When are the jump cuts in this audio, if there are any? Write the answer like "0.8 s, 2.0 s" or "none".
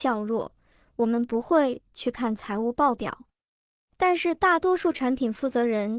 none